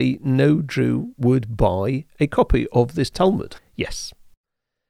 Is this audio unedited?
no; 1 cut; at 3.6 s

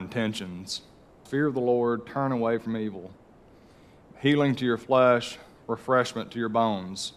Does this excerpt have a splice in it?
yes; 1 cut; at 1.3 s

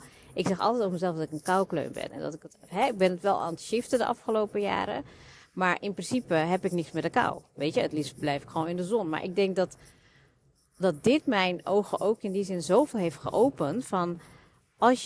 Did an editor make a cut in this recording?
no; 0 cuts

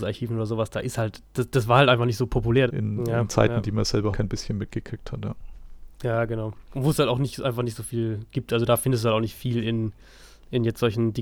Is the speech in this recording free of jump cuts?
no; 2 cuts; at 2.7 s, 4.1 s

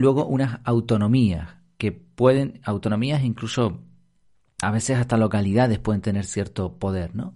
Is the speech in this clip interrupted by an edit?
yes; 1 cut; at 4.6 s

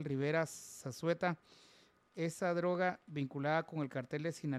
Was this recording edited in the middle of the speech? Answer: yes; 1 cut; at 2.0 s

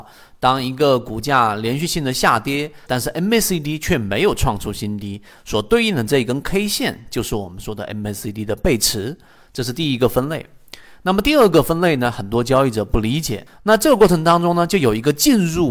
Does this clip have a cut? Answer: yes; 2 cuts; at 2.9 s, 13.5 s

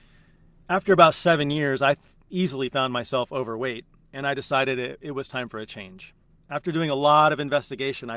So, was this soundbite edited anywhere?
no; 0 cuts

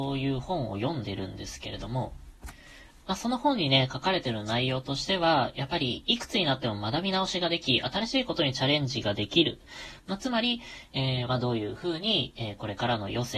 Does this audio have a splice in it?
yes; 2 cuts; at 10.0 s, 11.3 s

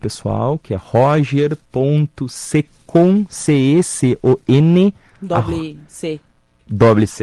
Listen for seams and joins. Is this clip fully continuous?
no; 1 cut; at 3.8 s

